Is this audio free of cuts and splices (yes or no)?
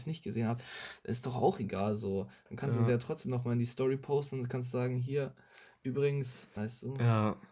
no